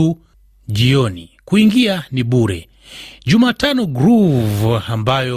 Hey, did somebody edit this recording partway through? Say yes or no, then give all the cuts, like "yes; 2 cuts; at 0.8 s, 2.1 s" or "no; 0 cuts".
no; 0 cuts